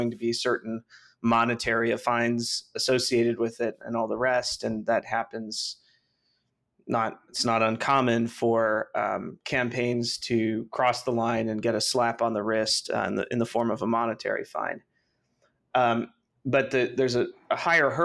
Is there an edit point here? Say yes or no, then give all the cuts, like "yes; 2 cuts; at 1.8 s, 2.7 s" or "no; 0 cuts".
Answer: no; 0 cuts